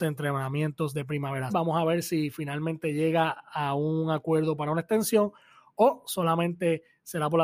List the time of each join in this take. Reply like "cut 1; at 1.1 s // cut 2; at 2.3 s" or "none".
cut 1; at 1.5 s